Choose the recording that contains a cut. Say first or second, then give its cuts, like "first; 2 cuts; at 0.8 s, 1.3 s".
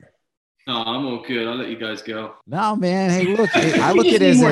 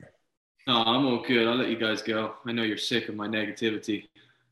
first; 1 cut; at 2.4 s